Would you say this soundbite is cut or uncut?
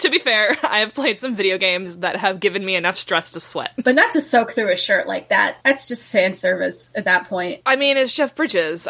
uncut